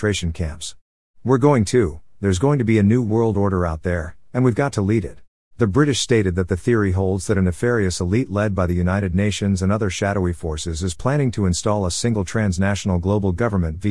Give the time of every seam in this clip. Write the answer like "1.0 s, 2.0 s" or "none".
1.1 s, 5.5 s